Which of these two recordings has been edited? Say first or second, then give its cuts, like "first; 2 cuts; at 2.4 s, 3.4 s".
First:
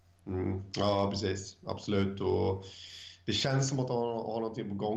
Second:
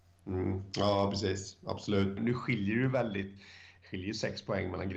second; 1 cut; at 2.2 s